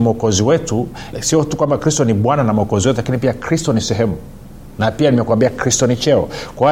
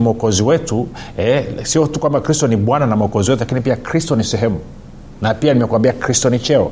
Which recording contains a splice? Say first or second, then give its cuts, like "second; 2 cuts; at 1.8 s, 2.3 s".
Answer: first; 1 cut; at 1.1 s